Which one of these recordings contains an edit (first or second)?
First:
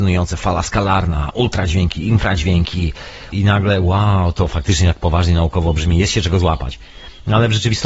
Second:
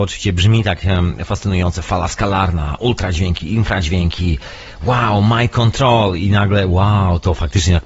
first